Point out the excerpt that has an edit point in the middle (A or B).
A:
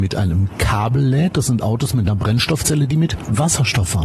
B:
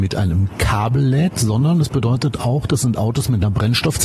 A